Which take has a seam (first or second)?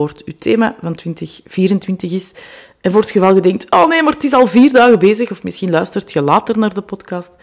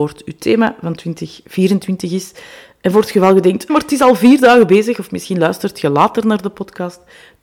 second